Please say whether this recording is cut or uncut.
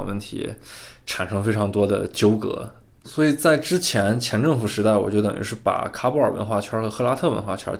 uncut